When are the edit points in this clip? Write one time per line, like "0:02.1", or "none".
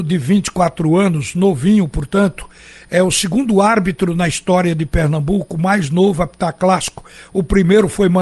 none